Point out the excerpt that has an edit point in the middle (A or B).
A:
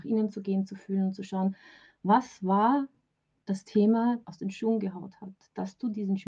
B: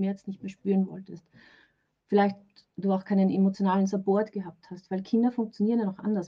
A